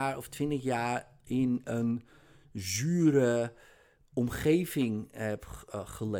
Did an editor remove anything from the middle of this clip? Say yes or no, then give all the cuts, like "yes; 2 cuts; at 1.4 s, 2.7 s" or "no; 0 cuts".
no; 0 cuts